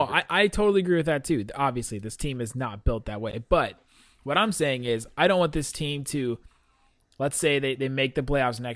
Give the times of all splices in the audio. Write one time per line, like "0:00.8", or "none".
none

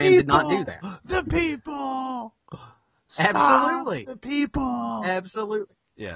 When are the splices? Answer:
none

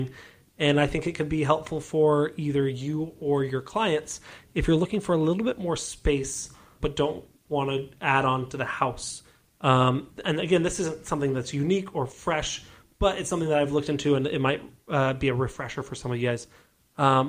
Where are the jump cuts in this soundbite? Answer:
0:06.8

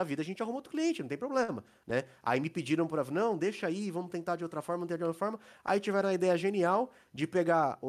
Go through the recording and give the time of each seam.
none

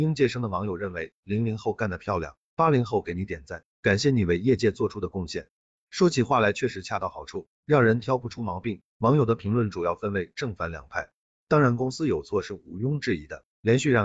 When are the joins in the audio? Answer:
0:05.8
0:08.9
0:11.3

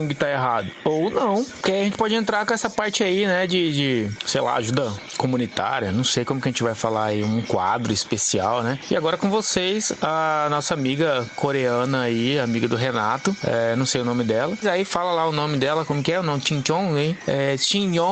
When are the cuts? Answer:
0:14.6

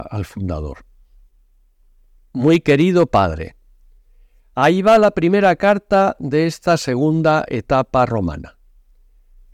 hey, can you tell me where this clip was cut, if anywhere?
none

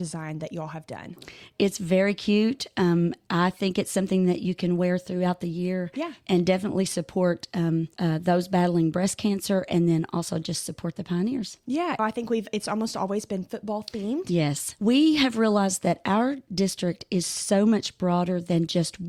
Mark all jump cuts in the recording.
0:07.9
0:12.0
0:14.8

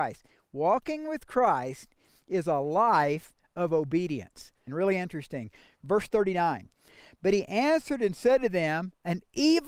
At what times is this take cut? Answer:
0:04.7

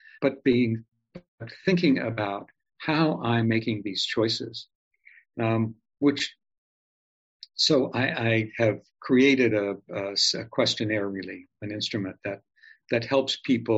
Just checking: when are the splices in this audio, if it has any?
none

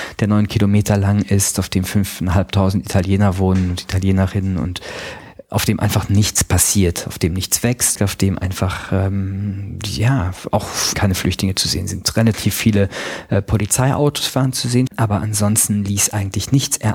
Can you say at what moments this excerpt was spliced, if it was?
0:08.0
0:10.9
0:14.9

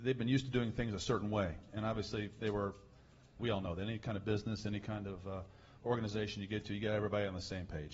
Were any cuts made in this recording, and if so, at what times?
0:03.4

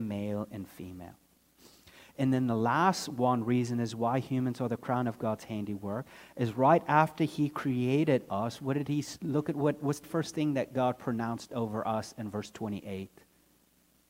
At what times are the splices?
0:10.0

